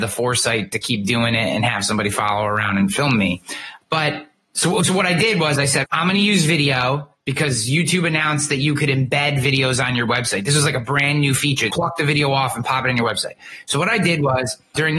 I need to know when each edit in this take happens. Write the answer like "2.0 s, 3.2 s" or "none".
5.8 s, 11.7 s

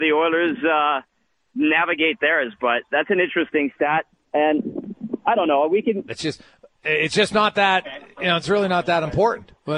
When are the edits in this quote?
6.1 s

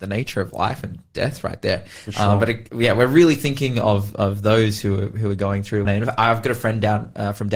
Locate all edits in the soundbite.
2.7 s, 5.8 s

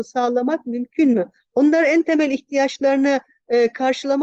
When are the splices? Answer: 1.4 s

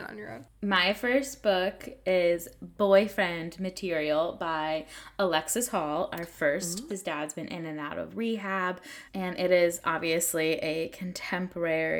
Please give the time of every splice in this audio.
6.9 s, 9.1 s

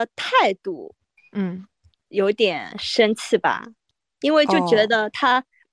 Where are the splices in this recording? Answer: none

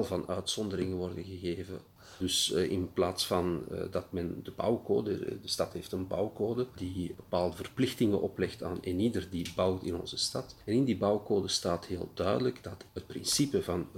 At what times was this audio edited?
none

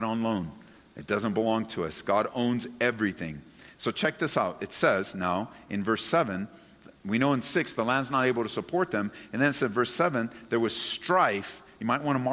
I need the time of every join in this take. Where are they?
none

